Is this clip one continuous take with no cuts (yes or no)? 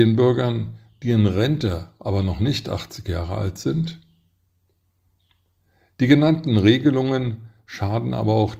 yes